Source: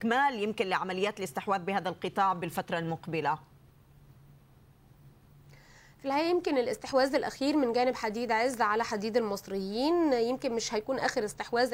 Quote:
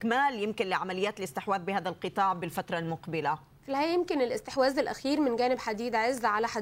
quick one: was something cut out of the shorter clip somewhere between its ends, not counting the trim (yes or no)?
yes